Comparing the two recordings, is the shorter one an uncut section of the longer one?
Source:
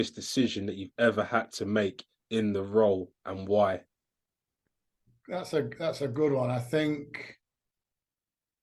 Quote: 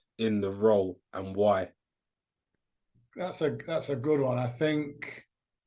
yes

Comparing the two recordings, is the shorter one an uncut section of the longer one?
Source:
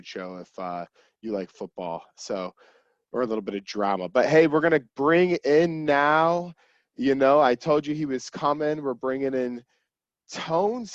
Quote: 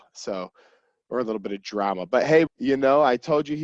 no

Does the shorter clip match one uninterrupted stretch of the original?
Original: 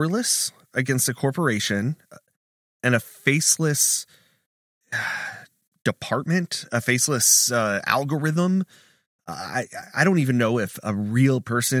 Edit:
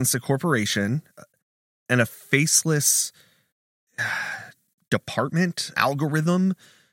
no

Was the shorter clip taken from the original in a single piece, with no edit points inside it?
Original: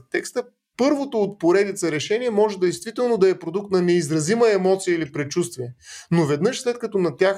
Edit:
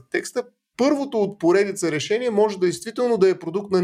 yes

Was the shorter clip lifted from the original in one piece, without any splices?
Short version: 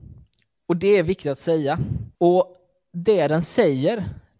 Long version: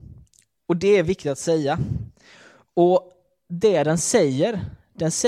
no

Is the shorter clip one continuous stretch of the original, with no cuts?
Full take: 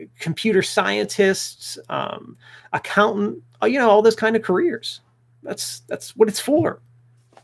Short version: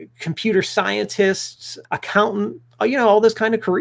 no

